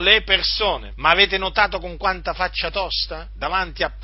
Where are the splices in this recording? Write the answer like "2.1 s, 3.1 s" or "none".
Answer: 0.9 s